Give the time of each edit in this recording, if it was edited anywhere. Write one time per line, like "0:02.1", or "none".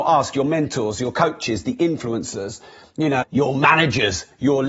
0:03.2